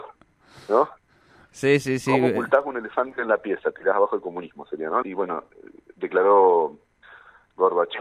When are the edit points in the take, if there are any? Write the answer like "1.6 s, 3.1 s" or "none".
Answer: 5.0 s

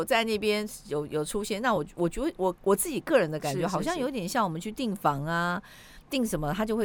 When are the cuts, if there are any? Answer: none

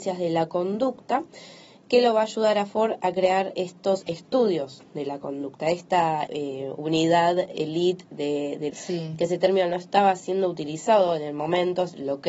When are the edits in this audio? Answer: 6.3 s, 8.7 s

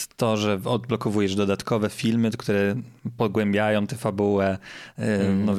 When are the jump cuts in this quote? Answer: none

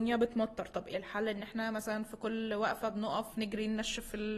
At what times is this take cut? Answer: 0.9 s

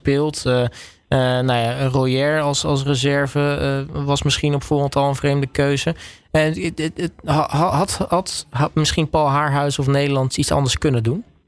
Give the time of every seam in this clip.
10.3 s

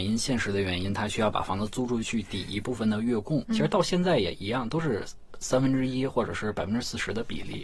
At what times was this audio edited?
2.0 s, 3.4 s

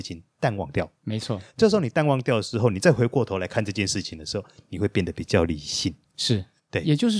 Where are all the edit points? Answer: none

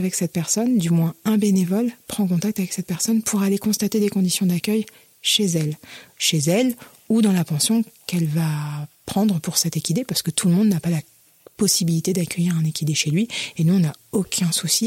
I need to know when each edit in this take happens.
none

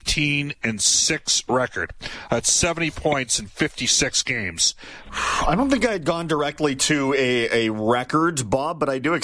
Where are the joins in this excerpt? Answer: 5.0 s

